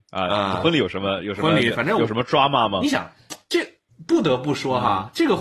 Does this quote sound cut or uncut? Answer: uncut